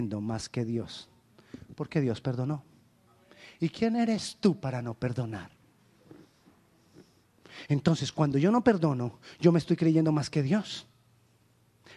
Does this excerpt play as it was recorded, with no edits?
yes; 0 cuts

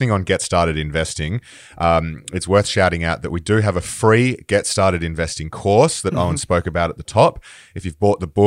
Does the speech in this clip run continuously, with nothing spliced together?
yes; 0 cuts

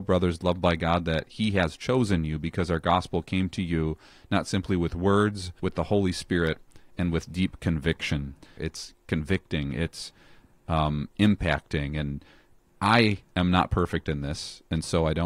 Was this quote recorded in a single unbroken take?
no; 2 cuts; at 5.6 s, 8.6 s

